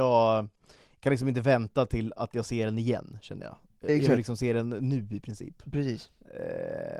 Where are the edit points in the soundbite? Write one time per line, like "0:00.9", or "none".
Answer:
none